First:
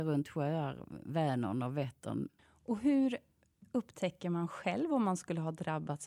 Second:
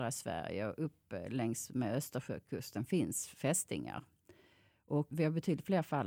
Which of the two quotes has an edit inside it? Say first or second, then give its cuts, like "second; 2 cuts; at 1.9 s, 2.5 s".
first; 1 cut; at 2.3 s